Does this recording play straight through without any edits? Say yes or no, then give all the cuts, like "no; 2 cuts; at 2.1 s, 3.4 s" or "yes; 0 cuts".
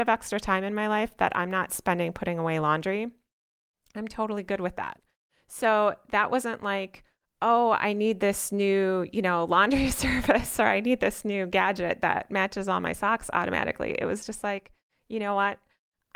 yes; 0 cuts